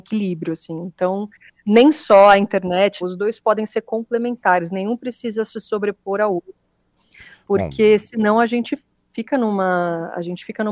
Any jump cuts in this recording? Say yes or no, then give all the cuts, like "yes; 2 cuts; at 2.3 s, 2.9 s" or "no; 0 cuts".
yes; 1 cut; at 3.0 s